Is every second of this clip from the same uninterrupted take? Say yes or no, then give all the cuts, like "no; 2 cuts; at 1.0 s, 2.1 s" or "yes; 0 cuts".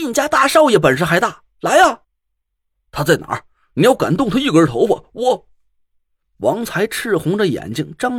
no; 1 cut; at 2.0 s